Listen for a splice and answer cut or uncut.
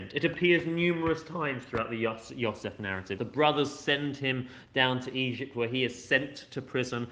cut